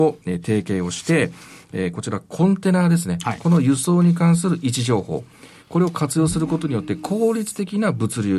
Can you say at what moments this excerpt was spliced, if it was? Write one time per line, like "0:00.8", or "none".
none